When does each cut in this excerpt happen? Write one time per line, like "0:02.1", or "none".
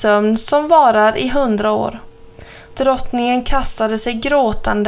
0:02.7